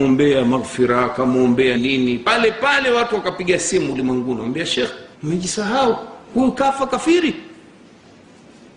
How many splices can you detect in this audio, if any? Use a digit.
2